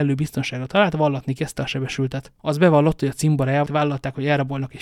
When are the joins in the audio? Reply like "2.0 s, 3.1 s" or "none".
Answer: 2.4 s, 3.7 s